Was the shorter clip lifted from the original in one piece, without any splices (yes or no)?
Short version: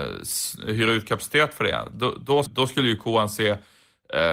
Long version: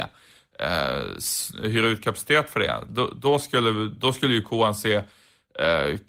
no